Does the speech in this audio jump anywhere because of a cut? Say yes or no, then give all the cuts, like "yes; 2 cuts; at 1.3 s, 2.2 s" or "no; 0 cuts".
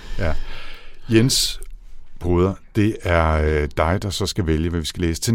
no; 0 cuts